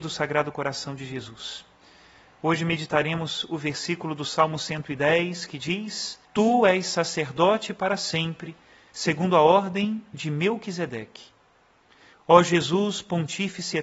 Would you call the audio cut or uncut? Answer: cut